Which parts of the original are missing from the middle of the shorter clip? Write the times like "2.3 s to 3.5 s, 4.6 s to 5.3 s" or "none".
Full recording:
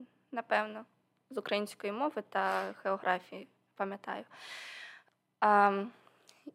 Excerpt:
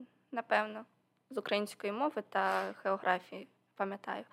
none